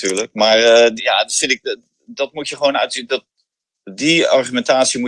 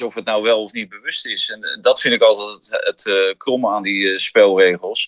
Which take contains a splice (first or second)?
first